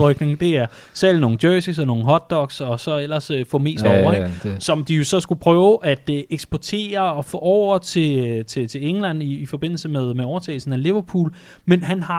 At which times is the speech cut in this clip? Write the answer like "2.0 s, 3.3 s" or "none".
3.8 s

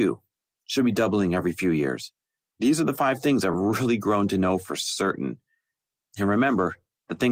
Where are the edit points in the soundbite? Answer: none

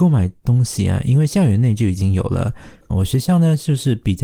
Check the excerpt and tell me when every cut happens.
2.9 s

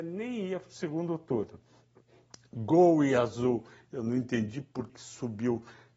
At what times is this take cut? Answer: 4.9 s

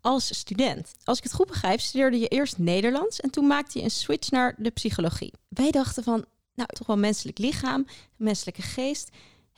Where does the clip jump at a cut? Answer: 5.5 s, 6.7 s

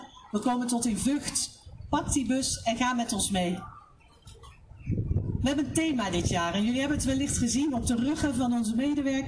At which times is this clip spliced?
none

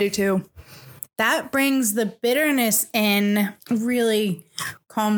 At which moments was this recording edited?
3.6 s

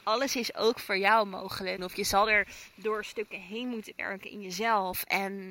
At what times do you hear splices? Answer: 1.8 s

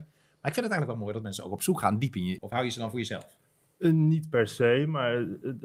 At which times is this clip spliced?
2.4 s

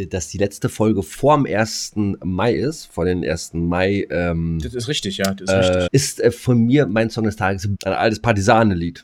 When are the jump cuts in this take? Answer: 5.9 s, 7.7 s

